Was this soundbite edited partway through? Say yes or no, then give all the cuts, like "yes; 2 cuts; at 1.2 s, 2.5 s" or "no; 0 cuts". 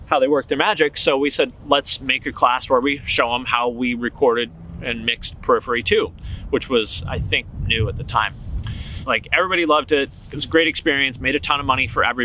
yes; 1 cut; at 9.0 s